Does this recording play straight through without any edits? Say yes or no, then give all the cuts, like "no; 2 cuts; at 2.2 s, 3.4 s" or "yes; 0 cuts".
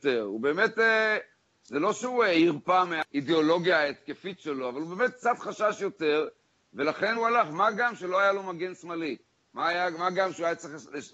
no; 1 cut; at 7.2 s